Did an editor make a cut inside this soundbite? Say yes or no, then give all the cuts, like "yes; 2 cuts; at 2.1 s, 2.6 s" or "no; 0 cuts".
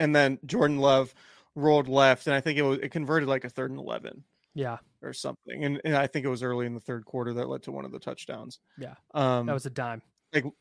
no; 0 cuts